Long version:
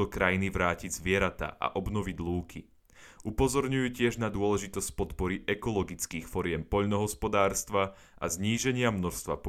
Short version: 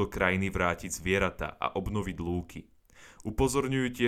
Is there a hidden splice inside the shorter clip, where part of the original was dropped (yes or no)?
no